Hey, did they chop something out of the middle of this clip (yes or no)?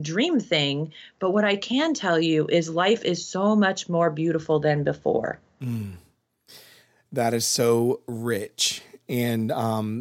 no